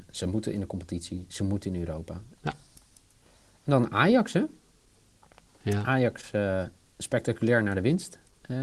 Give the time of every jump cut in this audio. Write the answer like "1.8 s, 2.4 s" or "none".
2.4 s